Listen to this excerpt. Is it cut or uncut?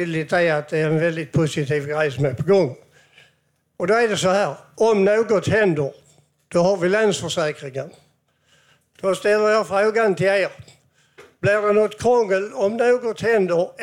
uncut